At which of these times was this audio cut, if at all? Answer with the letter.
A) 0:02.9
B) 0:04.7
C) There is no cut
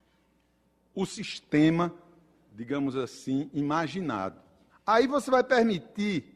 B